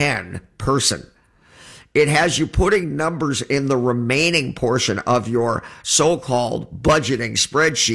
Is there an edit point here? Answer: no; 0 cuts

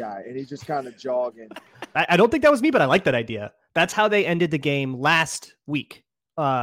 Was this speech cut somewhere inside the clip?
yes; 1 cut; at 1.9 s

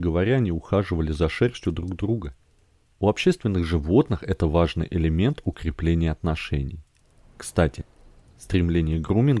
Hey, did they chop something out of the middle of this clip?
no; 0 cuts

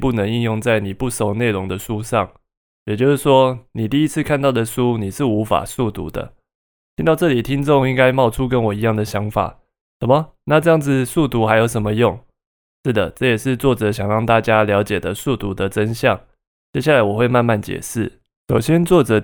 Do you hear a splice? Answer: no; 0 cuts

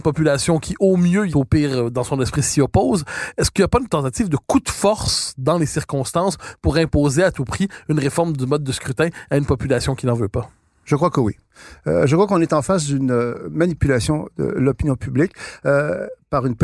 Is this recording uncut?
no; 1 cut; at 1.3 s

